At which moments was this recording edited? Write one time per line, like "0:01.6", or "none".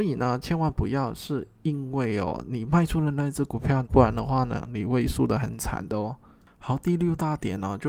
0:03.8